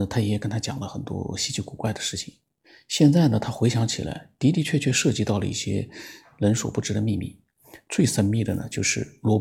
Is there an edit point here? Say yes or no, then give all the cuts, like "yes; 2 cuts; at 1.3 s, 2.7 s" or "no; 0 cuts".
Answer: no; 0 cuts